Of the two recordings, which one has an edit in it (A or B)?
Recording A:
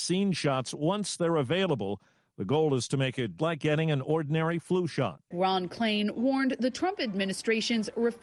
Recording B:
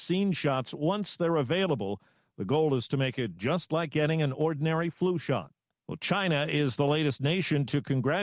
A